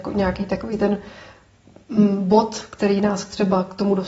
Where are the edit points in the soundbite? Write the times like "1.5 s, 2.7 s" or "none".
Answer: none